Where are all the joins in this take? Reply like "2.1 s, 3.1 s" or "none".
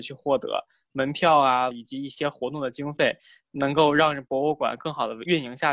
1.7 s